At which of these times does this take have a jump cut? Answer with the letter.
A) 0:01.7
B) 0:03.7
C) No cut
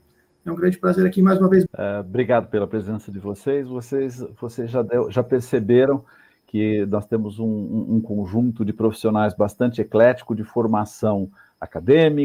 A